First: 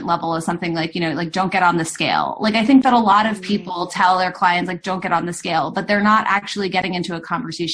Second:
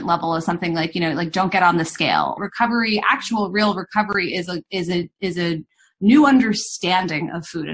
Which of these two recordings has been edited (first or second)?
second